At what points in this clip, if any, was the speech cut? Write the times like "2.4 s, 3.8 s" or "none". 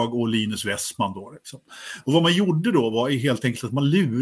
none